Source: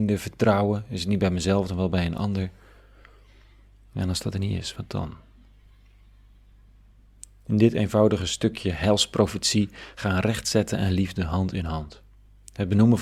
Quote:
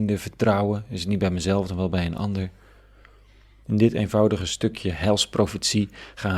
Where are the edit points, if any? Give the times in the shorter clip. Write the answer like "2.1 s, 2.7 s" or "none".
3.6 s